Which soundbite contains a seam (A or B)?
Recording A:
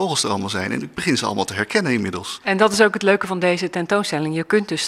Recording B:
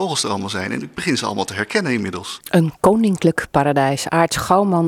B